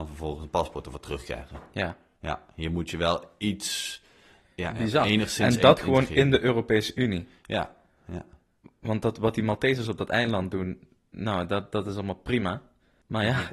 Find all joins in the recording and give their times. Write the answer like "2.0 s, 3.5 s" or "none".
none